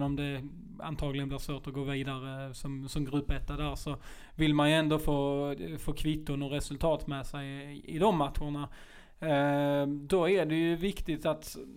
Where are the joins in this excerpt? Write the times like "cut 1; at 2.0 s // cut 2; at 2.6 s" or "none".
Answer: none